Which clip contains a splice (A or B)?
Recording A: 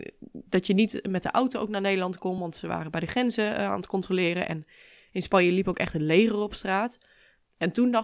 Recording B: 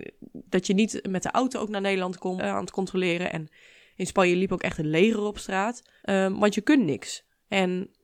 B